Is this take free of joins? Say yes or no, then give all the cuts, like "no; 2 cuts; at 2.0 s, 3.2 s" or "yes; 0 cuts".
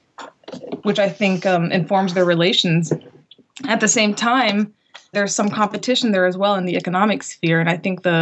no; 1 cut; at 5.1 s